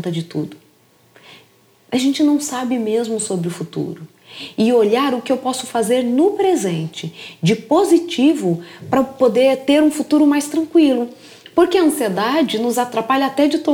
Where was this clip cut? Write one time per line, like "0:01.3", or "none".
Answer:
none